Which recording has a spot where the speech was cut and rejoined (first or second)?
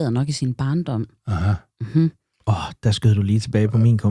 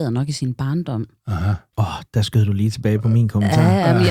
second